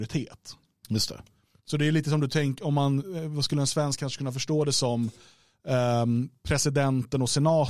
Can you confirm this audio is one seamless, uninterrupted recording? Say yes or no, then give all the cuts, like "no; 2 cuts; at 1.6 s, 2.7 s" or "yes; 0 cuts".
yes; 0 cuts